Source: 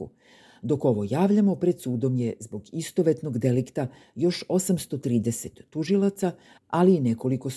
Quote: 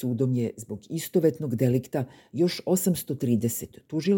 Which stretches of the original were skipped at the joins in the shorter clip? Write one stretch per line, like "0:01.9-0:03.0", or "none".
none